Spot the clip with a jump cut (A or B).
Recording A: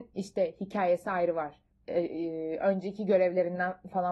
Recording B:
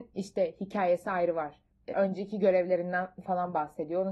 B